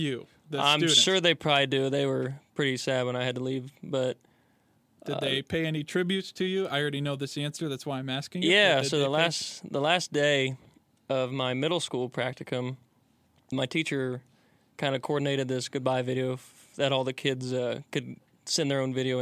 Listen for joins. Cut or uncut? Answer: cut